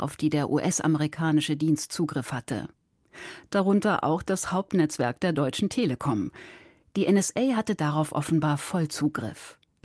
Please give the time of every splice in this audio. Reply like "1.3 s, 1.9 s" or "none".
none